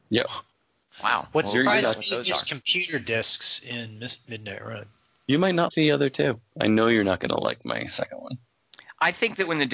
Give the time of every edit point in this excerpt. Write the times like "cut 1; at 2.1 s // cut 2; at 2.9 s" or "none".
cut 1; at 5.7 s